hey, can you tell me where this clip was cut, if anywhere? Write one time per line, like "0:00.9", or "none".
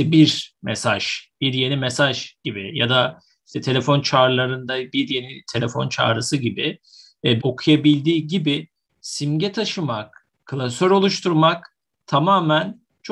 0:07.4